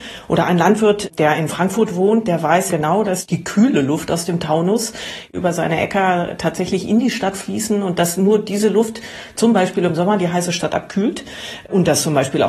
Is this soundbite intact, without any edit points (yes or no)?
no